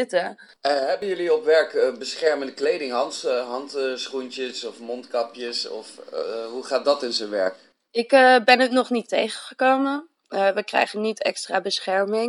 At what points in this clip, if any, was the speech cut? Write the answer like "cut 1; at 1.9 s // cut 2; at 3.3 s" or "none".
none